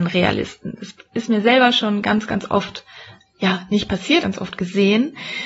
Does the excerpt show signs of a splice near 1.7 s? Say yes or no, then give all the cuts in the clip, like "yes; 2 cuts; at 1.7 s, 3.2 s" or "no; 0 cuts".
no; 2 cuts; at 3.2 s, 4.2 s